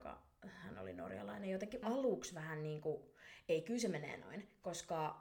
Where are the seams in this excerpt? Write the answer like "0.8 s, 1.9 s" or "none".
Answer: 1.8 s

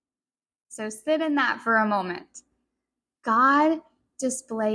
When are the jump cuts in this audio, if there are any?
none

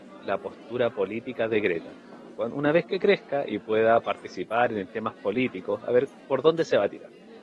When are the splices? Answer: none

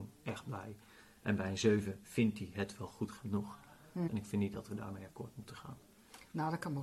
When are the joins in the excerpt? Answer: 4.1 s

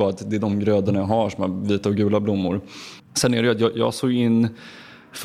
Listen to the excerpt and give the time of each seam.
3.0 s

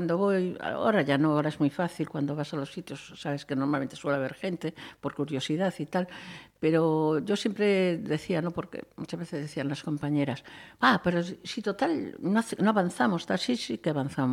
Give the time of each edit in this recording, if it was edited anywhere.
none

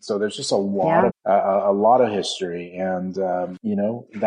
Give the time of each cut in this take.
1.1 s

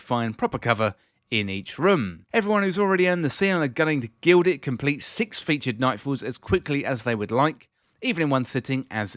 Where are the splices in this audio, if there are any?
2.3 s

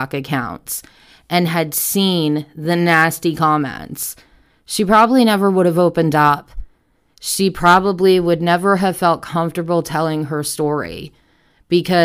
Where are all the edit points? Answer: none

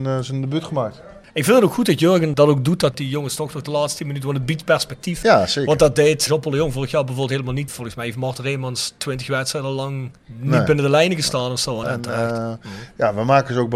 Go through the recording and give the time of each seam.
10.2 s, 11.8 s

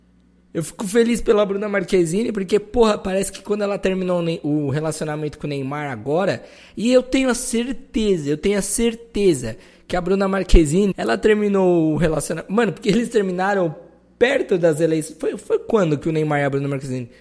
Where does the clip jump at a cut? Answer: 10.9 s

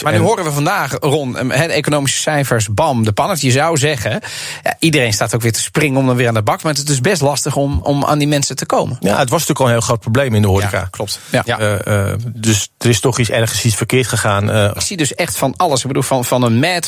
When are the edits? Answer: 7.8 s, 11.4 s, 14.8 s

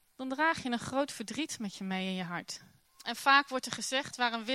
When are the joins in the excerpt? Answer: 2.8 s

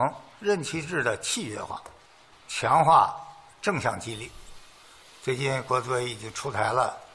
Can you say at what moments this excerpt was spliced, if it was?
2.3 s

